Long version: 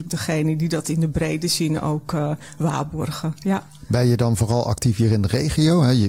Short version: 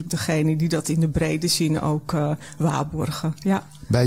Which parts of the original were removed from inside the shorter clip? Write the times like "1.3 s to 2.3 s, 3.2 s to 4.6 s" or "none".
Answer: none